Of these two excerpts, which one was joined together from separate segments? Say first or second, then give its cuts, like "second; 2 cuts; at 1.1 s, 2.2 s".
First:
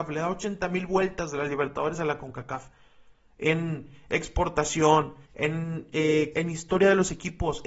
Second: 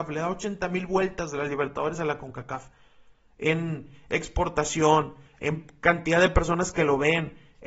first; 2 cuts; at 5.3 s, 6.3 s